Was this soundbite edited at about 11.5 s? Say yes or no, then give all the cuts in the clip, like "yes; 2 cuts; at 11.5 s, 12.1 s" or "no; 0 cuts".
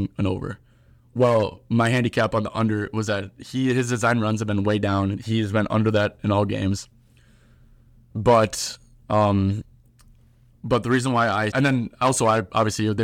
yes; 1 cut; at 11.5 s